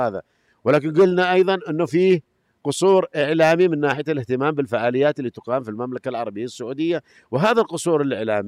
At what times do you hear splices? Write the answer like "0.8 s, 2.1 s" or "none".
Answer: none